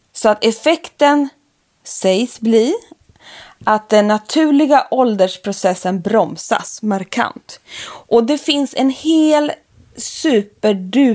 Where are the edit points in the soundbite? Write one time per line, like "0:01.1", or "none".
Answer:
none